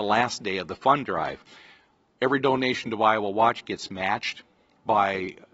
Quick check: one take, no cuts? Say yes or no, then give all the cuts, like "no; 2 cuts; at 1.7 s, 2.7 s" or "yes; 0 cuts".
yes; 0 cuts